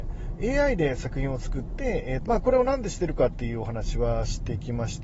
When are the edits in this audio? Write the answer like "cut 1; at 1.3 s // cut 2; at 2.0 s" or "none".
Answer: cut 1; at 2.3 s